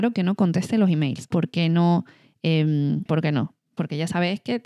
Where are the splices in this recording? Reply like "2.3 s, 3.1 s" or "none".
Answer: 1.3 s, 3.1 s